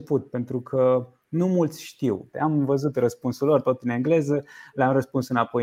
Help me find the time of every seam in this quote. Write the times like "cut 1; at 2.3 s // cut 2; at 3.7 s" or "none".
cut 1; at 2.3 s